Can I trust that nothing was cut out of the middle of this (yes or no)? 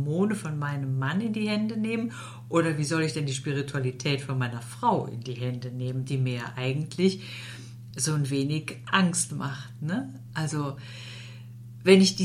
yes